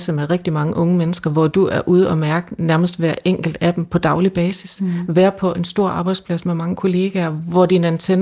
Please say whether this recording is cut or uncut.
uncut